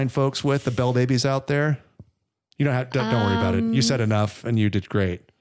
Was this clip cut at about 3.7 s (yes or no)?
no